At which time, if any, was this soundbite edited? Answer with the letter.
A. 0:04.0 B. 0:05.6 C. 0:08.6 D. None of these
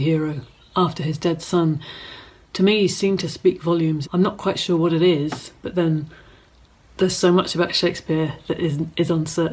A